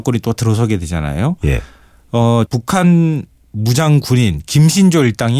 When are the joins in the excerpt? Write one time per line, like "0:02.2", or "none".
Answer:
0:02.5